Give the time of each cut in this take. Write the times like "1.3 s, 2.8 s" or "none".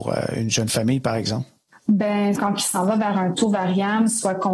2.4 s